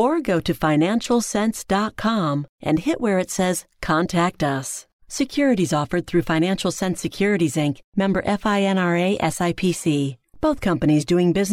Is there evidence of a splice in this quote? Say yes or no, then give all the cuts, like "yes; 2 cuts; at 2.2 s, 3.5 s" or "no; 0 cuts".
yes; 1 cut; at 5.0 s